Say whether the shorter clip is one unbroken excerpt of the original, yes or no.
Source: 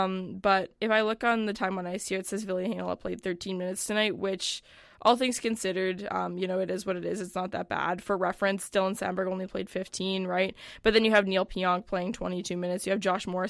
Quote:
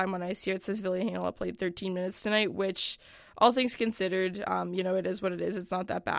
yes